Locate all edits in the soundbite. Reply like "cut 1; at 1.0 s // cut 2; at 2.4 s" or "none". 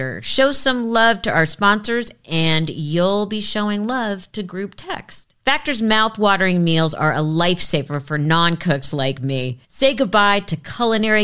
cut 1; at 9.6 s